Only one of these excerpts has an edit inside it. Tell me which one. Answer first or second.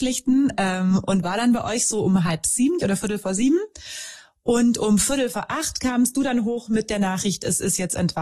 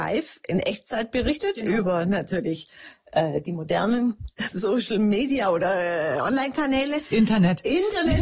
first